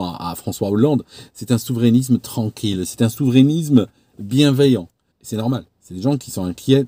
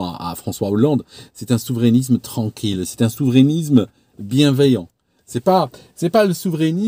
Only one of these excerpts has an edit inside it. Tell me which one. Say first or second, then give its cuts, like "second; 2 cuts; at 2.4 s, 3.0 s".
first; 1 cut; at 5.1 s